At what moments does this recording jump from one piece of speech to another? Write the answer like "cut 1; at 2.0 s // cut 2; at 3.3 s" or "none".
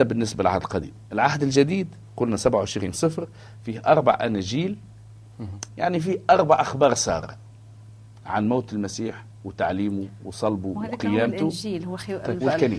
cut 1; at 5.7 s